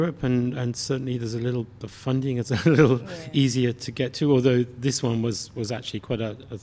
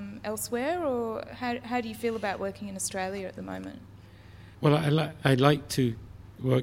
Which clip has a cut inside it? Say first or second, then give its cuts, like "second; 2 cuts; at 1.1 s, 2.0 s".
second; 1 cut; at 4.5 s